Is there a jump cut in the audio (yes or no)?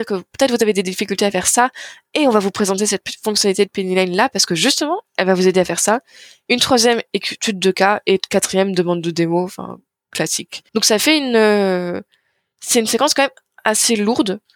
yes